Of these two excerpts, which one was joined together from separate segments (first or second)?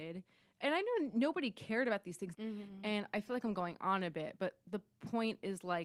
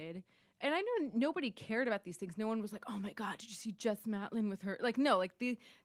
first